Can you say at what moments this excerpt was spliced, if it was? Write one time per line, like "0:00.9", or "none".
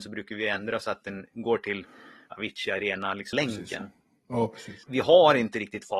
0:03.3
0:04.8